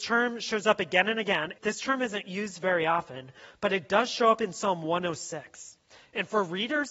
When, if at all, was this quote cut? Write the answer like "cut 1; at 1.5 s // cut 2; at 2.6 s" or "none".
cut 1; at 1.5 s